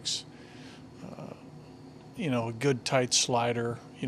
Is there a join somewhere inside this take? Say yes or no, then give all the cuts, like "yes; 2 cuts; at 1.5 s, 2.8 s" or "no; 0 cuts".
yes; 1 cut; at 2.1 s